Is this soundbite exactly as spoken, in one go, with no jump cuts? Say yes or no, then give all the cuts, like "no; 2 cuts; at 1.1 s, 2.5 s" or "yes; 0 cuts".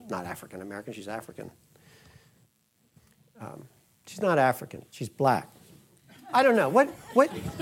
yes; 0 cuts